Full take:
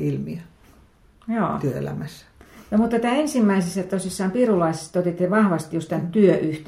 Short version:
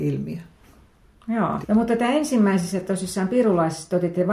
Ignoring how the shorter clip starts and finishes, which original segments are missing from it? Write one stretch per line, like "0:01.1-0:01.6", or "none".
0:01.6-0:02.6